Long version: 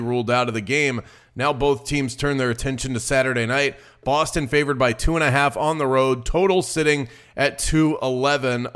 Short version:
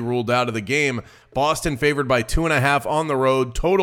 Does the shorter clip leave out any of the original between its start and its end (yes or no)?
yes